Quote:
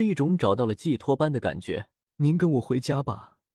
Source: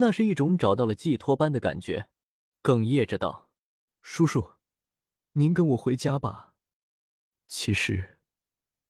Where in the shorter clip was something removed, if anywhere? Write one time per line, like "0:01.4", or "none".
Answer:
0:02.1